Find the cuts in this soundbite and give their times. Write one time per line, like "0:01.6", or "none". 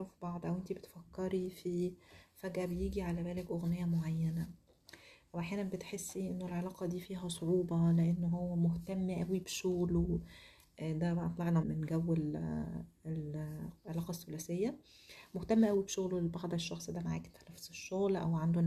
0:11.6